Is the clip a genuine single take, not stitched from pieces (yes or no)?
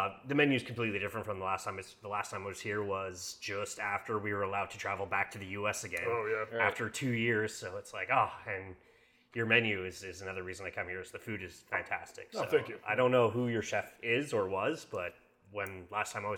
yes